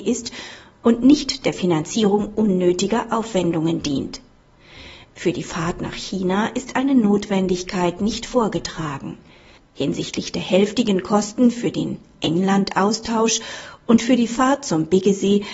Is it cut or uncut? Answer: cut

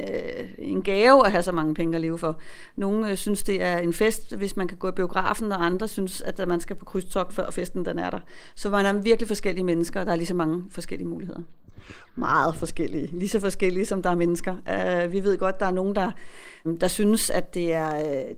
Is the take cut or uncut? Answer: cut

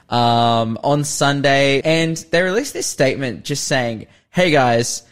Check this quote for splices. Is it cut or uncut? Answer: cut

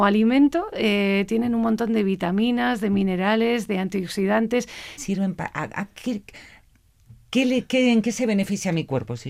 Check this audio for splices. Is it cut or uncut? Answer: cut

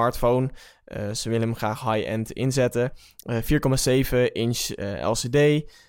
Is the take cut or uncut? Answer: uncut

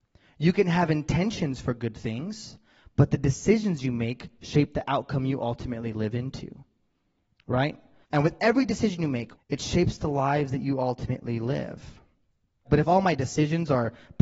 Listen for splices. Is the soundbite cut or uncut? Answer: cut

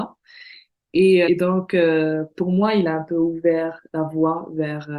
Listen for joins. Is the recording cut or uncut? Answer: cut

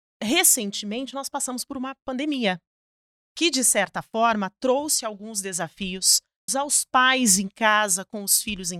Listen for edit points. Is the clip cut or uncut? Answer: cut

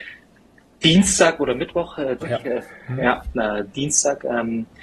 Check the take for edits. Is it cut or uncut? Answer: cut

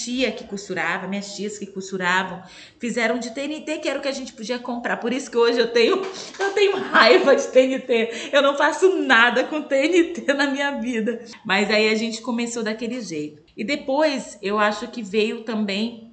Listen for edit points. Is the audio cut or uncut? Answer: uncut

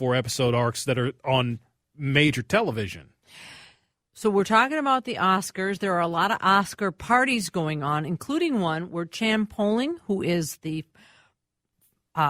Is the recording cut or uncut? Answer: uncut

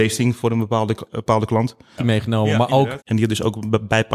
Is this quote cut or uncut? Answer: cut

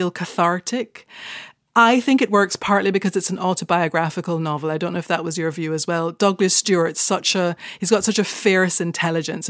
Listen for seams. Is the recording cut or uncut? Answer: uncut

